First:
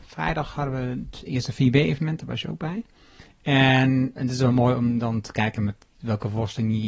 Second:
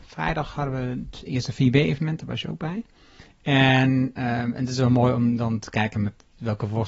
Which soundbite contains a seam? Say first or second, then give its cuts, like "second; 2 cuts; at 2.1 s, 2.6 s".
first; 1 cut; at 4.2 s